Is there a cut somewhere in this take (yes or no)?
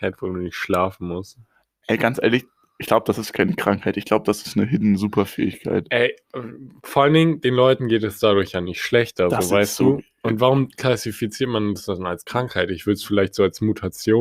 no